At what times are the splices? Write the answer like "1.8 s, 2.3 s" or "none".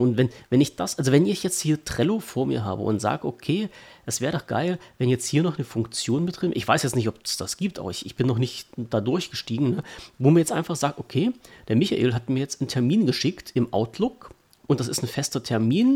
none

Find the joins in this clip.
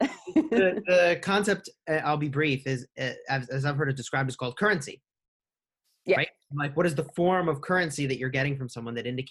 none

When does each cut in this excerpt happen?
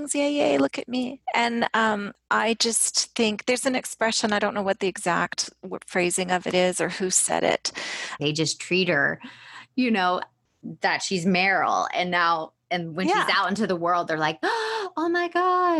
8.2 s

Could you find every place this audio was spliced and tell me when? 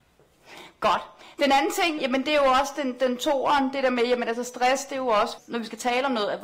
2.0 s, 5.4 s

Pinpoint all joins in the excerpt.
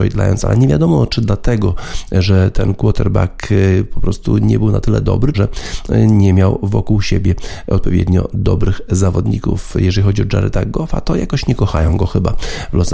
5.3 s

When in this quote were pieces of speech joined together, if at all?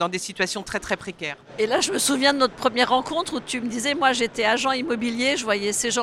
none

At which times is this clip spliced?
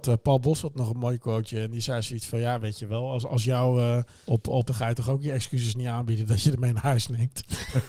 4.7 s

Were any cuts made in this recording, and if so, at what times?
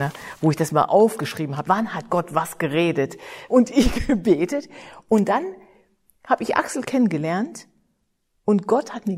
1.7 s, 3.5 s

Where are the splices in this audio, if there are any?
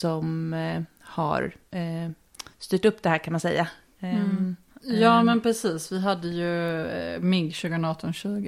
4.7 s

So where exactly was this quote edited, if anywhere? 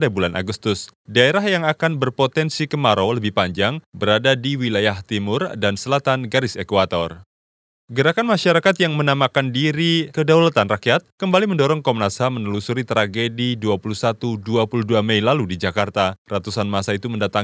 none

